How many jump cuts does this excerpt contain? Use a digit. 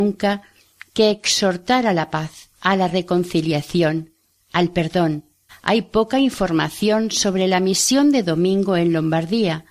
2